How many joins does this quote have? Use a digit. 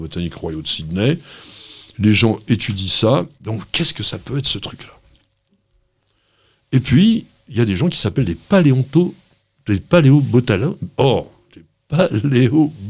1